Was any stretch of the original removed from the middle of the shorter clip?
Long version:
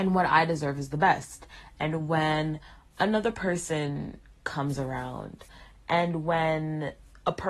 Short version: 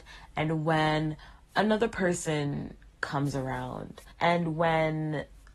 yes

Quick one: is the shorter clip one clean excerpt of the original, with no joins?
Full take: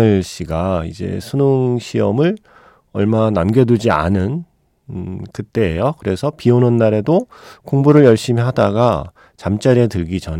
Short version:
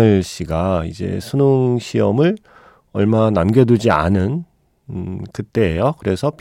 yes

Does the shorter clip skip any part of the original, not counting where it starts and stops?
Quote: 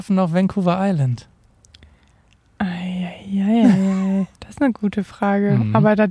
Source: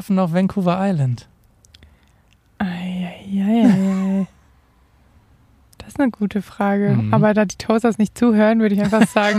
yes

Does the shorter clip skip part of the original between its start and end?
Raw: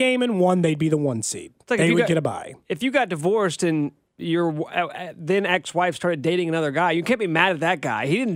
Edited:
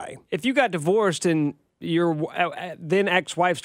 no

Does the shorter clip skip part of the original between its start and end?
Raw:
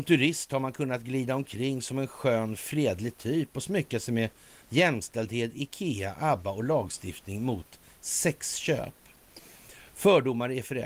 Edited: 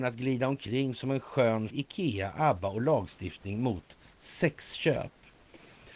yes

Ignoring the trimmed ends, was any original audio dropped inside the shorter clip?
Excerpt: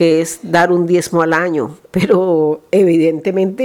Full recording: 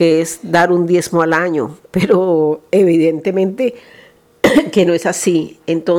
no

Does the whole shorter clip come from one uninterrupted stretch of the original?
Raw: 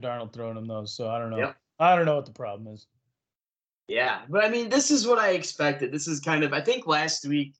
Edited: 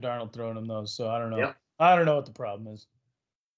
yes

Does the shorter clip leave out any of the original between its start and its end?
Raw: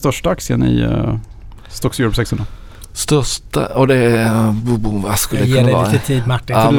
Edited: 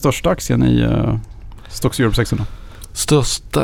no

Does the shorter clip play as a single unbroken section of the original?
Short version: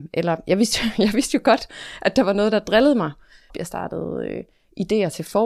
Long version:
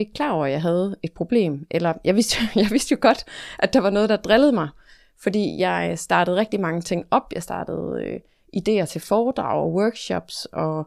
no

